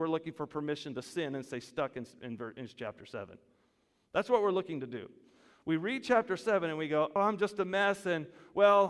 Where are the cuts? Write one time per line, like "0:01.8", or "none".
0:07.2